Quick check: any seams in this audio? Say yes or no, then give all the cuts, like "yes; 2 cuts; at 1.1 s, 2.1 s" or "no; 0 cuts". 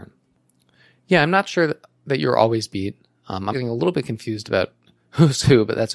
yes; 1 cut; at 3.5 s